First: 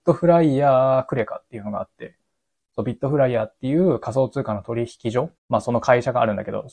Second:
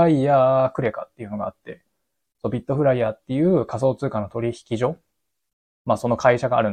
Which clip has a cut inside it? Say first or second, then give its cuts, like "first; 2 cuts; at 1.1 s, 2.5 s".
first; 1 cut; at 5.4 s